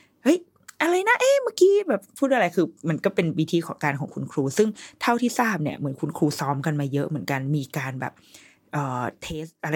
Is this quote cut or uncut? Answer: uncut